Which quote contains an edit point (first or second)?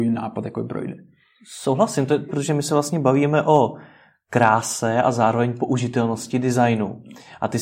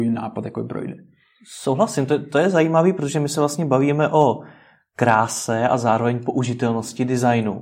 first